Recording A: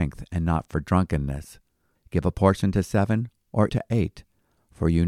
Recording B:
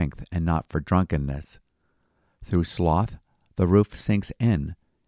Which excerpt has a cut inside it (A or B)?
A